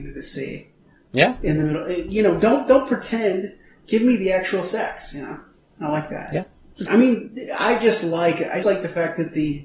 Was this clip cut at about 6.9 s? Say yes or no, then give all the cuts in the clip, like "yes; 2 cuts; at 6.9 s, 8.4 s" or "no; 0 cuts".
yes; 2 cuts; at 6.9 s, 8.6 s